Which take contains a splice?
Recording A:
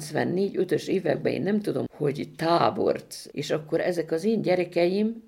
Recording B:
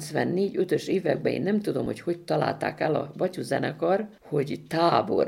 A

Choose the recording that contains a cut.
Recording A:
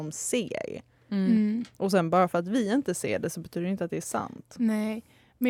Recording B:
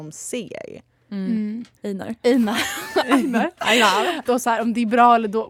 B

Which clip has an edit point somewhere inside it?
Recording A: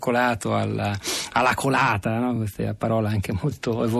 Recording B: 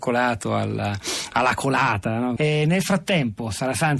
B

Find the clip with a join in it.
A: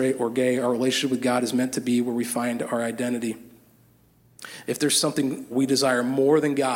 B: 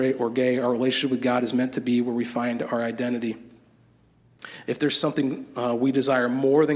A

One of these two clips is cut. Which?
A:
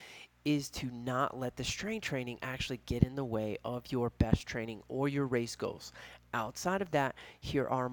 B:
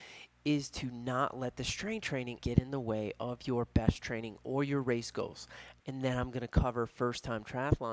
B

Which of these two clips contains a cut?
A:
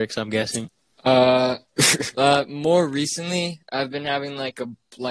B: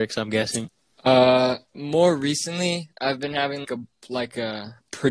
B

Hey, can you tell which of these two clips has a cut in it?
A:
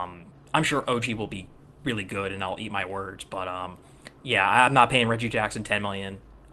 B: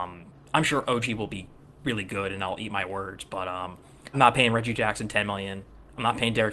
B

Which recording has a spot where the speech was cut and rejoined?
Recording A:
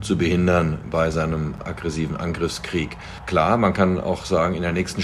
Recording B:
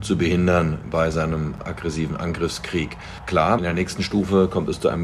B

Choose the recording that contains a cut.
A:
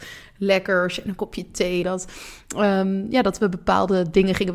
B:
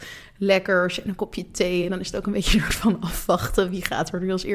A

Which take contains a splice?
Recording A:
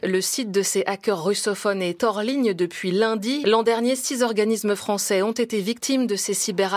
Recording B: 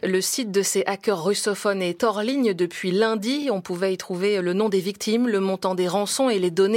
A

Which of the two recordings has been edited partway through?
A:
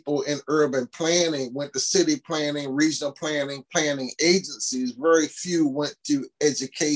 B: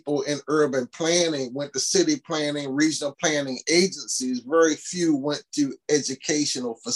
B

